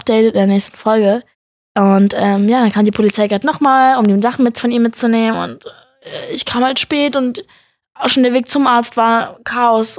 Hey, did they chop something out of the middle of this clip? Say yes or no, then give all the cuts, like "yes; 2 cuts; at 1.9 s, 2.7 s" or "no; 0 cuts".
no; 0 cuts